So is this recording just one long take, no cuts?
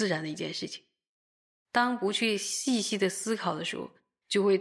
yes; 0 cuts

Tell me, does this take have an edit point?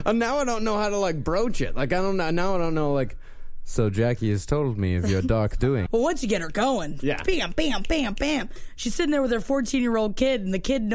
yes; 1 cut; at 5.9 s

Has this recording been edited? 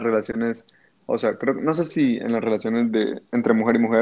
no; 0 cuts

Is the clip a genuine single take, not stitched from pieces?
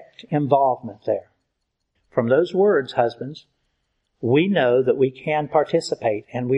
no; 1 cut; at 2.0 s

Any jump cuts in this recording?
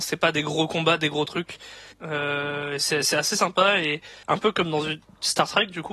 yes; 2 cuts; at 1.9 s, 4.2 s

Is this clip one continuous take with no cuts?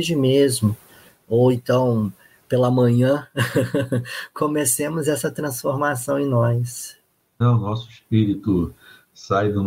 no; 1 cut; at 7.4 s

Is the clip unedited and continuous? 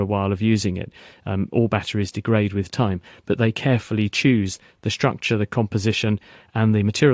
yes; 0 cuts

